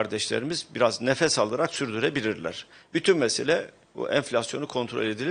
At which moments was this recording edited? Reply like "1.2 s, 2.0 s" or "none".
none